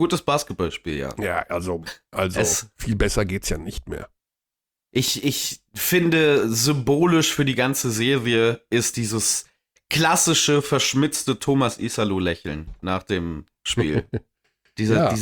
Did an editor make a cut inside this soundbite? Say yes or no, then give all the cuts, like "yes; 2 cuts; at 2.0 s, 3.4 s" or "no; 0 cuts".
yes; 1 cut; at 2.1 s